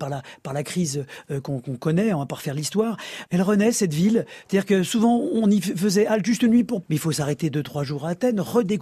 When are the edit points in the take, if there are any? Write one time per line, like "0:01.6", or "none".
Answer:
0:03.3
0:06.8